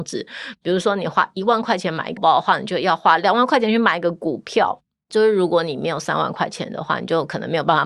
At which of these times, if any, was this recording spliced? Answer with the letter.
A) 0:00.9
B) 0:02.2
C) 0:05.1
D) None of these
B